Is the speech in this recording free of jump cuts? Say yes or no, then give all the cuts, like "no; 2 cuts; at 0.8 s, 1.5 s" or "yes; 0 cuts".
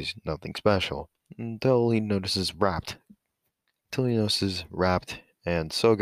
yes; 0 cuts